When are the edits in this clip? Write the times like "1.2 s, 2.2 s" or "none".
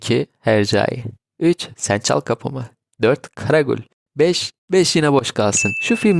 4.6 s